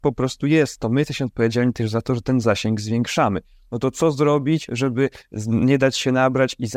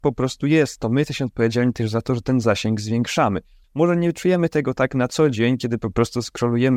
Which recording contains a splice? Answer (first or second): second